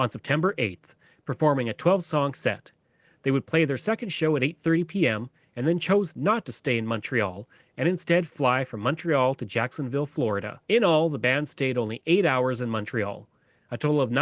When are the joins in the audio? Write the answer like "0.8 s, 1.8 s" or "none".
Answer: 10.6 s